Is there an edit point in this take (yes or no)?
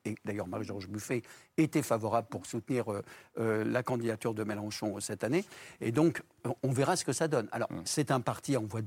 no